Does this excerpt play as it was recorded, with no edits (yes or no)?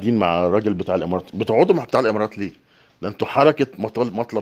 yes